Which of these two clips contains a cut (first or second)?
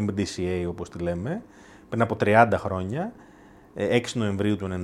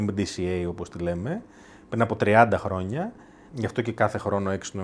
second